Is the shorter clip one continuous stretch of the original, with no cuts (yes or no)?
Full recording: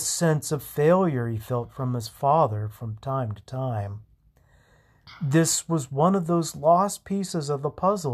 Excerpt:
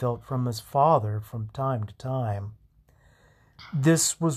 yes